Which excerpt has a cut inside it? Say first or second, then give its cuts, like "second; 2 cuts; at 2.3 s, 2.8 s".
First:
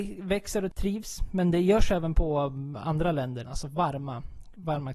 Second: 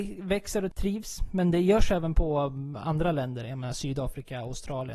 first; 1 cut; at 3.4 s